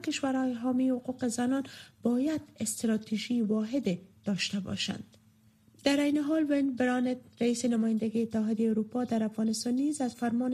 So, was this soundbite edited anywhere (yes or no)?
no